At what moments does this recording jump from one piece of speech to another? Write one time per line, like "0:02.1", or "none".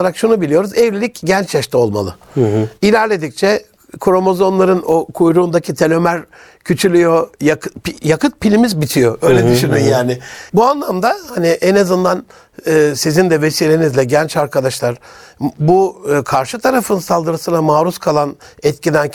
0:10.5